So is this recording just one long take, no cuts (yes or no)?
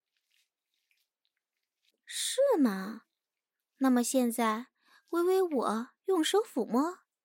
no